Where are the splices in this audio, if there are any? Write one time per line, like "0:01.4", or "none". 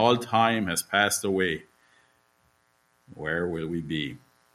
none